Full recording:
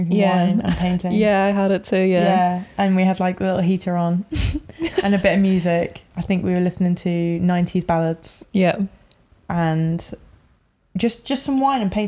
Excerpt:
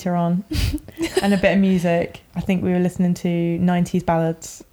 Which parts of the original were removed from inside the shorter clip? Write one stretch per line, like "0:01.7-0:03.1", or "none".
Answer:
none